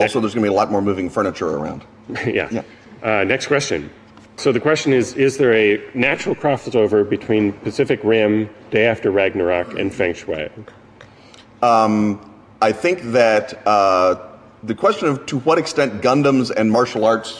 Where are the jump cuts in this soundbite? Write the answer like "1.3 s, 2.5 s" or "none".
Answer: none